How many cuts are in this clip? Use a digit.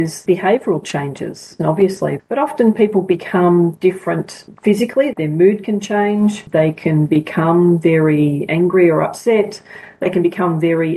1